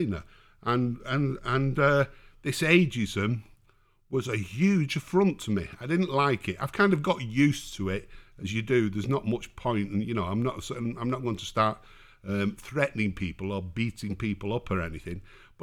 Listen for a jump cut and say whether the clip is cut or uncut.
uncut